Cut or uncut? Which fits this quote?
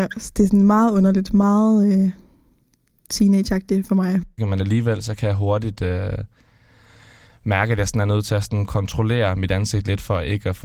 uncut